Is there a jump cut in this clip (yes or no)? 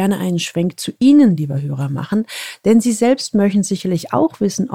no